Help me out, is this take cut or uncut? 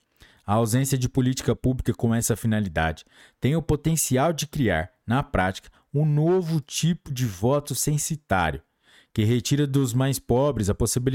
uncut